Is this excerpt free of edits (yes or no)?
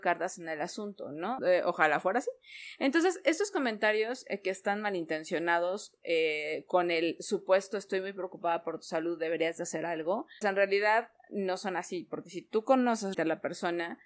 no